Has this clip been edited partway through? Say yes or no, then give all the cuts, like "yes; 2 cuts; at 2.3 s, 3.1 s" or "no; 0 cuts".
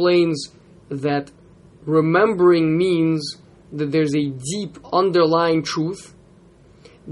no; 0 cuts